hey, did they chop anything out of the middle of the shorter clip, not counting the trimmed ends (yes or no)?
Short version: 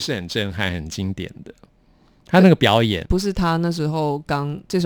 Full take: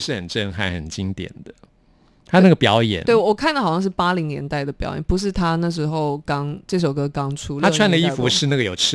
yes